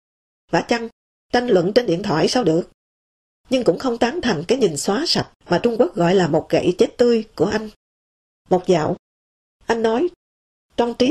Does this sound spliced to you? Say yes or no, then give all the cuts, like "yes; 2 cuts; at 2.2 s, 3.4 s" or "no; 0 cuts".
no; 0 cuts